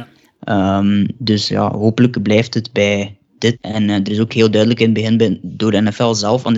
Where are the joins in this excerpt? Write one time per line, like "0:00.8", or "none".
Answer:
0:03.5